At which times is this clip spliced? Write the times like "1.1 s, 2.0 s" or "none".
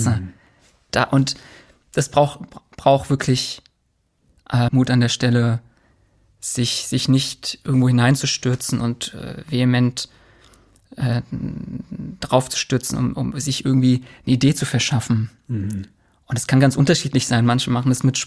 4.7 s